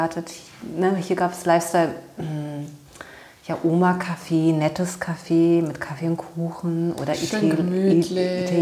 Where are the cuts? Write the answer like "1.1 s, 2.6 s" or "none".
none